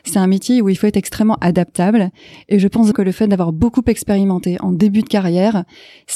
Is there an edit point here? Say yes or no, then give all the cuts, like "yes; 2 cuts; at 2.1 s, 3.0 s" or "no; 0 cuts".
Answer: yes; 1 cut; at 2.9 s